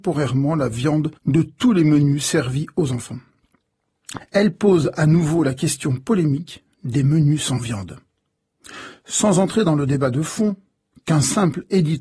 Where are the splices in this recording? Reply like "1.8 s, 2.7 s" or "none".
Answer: 1.2 s, 4.2 s